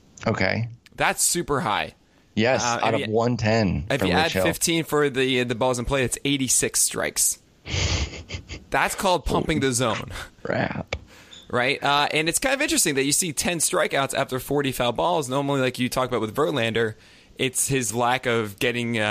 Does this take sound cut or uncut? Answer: uncut